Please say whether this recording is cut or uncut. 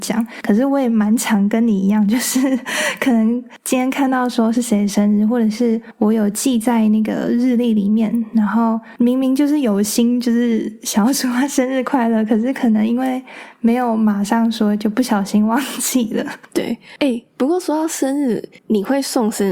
uncut